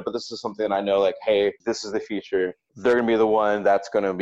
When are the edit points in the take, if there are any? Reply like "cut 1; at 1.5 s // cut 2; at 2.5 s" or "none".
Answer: cut 1; at 1.6 s